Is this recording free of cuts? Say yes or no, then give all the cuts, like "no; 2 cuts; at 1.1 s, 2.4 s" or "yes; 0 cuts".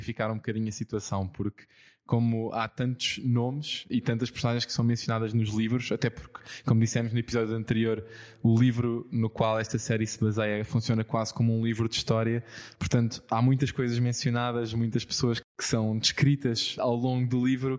yes; 0 cuts